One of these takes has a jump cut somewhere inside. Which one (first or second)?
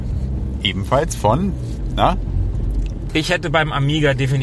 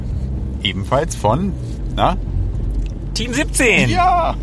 first